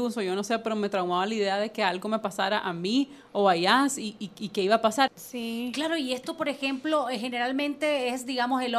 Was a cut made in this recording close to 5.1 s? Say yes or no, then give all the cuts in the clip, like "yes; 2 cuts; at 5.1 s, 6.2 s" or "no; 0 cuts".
yes; 1 cut; at 5.1 s